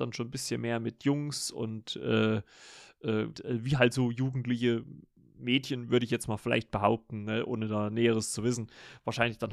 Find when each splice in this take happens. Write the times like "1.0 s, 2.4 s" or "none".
3.3 s